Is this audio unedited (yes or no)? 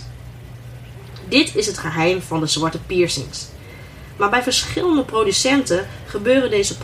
yes